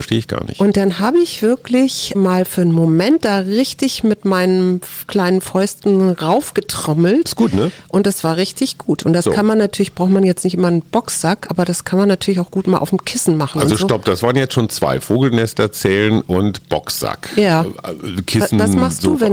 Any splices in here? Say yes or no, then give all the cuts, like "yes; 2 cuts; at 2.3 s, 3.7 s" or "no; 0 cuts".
yes; 1 cut; at 2.1 s